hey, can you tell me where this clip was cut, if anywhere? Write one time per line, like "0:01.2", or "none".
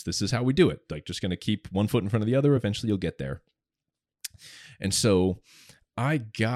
none